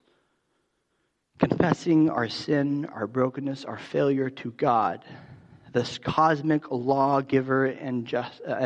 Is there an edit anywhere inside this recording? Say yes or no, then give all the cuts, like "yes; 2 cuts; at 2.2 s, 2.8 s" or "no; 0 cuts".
no; 0 cuts